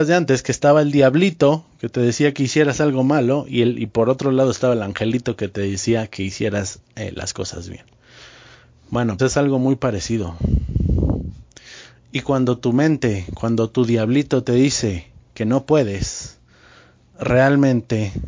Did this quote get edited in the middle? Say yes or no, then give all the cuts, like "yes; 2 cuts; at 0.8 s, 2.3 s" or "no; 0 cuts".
yes; 1 cut; at 9.2 s